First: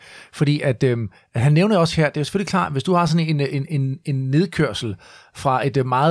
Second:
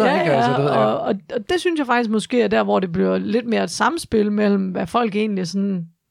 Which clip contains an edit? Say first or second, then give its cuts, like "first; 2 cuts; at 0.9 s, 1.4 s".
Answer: second; 1 cut; at 1.4 s